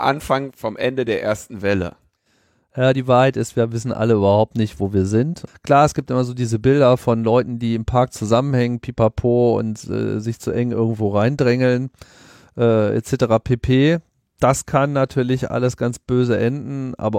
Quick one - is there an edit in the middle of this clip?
yes; 1 cut; at 5.5 s

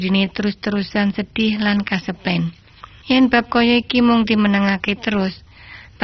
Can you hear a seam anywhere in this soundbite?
no; 0 cuts

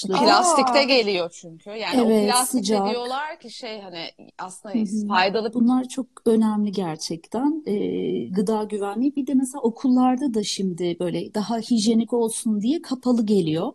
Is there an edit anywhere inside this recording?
yes; 1 cut; at 5.5 s

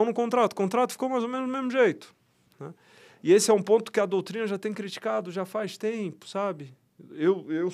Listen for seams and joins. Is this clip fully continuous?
yes; 0 cuts

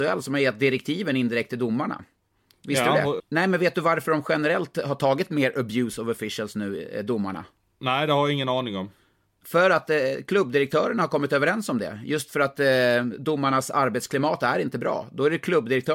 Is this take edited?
yes; 1 cut; at 3.2 s

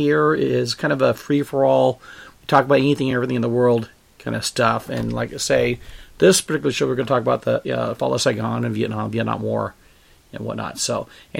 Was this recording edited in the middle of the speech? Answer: no; 0 cuts

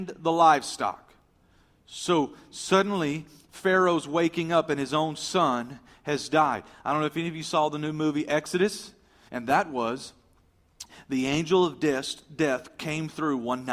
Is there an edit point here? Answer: yes; 1 cut; at 9.3 s

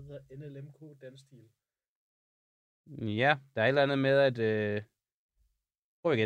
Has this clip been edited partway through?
no; 0 cuts

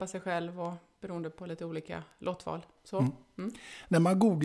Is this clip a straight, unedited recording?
yes; 0 cuts

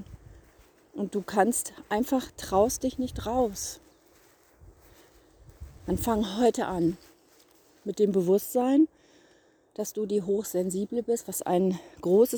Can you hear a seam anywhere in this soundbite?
no; 0 cuts

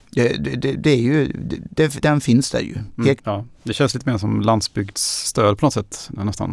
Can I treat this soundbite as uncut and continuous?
no; 2 cuts; at 2.0 s, 3.2 s

